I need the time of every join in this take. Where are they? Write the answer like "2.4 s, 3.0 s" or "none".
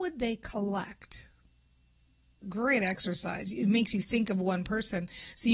2.4 s